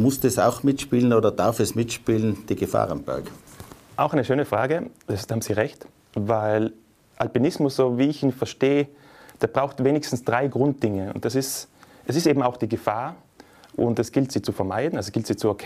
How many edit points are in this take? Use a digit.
0